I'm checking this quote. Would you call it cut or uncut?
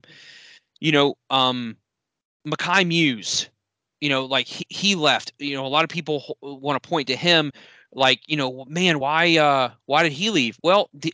uncut